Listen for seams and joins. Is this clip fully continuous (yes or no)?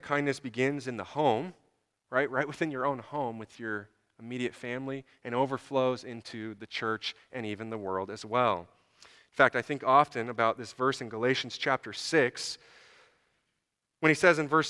yes